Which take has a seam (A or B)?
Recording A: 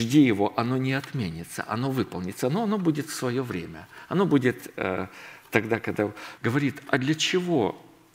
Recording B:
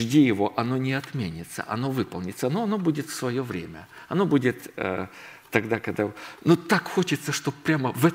A